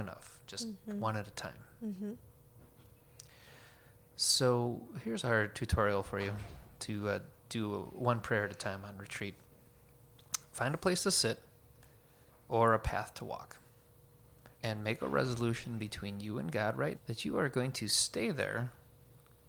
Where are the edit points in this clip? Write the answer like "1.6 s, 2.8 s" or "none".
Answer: 14.5 s, 16.9 s